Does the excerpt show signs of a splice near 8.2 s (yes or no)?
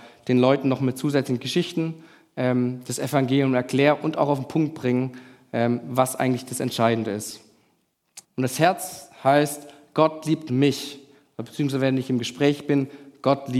yes